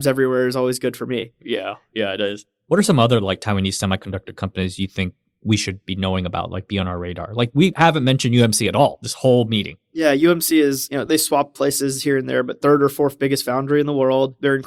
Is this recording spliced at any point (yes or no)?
no